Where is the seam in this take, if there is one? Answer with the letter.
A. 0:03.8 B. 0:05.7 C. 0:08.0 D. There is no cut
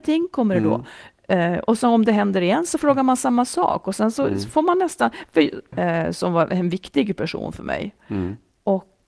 B